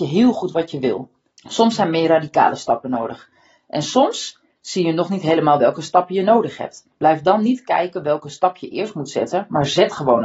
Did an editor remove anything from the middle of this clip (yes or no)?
yes